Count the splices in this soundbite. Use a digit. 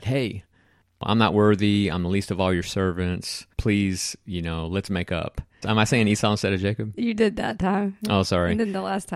2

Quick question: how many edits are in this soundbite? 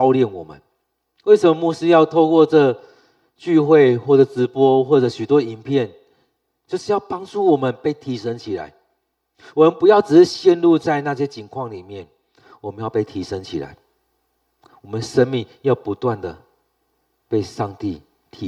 1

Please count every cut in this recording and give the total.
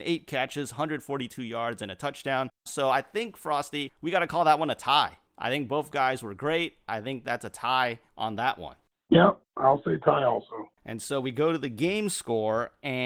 1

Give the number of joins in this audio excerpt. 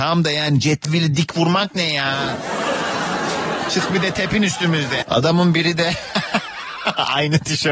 1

